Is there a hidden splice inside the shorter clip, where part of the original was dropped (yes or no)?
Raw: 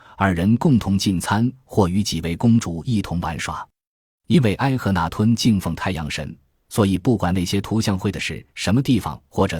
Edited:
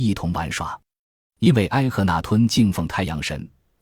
no